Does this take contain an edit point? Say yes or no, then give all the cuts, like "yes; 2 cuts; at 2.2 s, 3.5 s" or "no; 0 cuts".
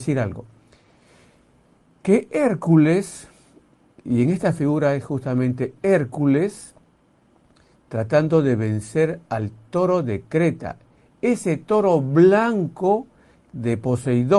no; 0 cuts